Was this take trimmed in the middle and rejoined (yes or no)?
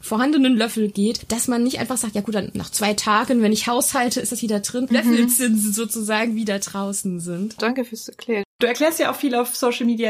yes